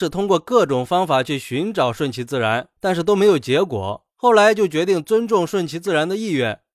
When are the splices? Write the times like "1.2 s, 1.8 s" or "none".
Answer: none